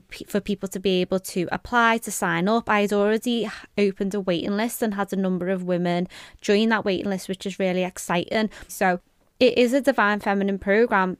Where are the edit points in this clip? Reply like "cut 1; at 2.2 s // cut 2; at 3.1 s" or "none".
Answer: cut 1; at 8.7 s